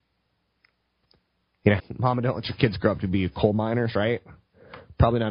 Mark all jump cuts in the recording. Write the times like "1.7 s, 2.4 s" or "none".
1.8 s